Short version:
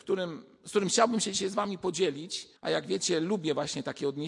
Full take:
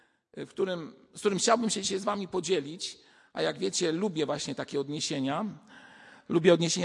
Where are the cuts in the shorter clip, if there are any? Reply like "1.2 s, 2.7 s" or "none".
2.6 s

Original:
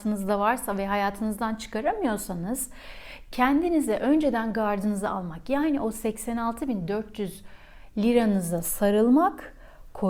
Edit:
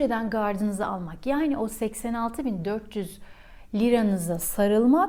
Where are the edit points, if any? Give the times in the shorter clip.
none

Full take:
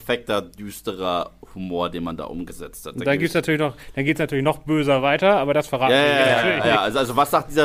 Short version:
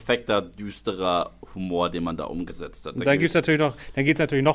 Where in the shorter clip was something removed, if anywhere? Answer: none

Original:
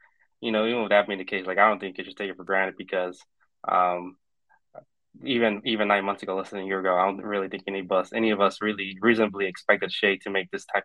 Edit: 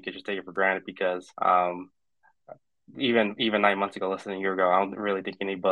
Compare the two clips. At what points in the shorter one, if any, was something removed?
1.3 s

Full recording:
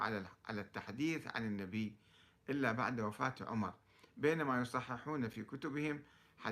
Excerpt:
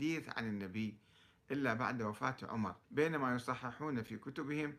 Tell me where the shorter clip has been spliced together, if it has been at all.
2.8 s

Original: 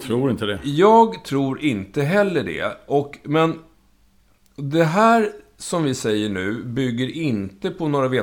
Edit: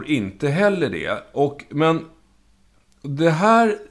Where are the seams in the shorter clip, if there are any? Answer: none

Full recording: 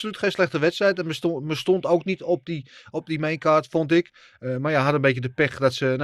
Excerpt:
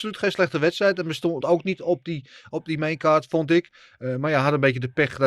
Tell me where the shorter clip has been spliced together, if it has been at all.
1.4 s

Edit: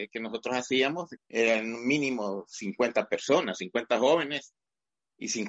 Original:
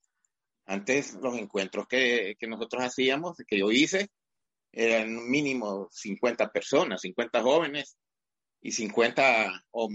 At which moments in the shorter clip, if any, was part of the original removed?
1.2 s

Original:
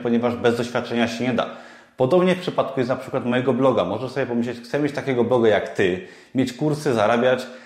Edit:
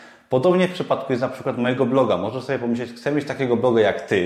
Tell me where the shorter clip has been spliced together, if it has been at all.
none

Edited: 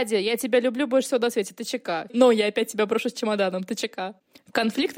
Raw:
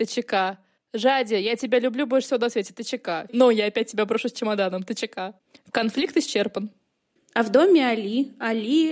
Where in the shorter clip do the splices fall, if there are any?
none

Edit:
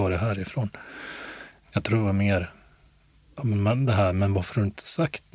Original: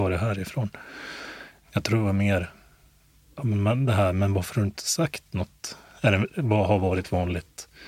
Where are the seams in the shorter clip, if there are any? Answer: none

